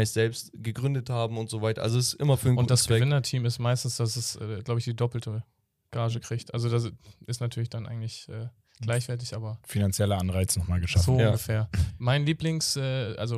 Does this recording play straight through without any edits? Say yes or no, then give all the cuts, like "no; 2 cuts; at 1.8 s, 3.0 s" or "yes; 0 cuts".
yes; 0 cuts